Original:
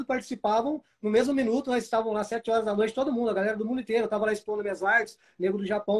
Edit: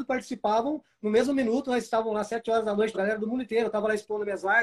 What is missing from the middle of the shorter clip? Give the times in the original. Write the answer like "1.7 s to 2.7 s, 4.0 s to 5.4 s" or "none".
2.9 s to 3.3 s